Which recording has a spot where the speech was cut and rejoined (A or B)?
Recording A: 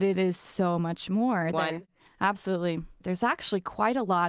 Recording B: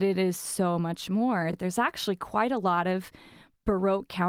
A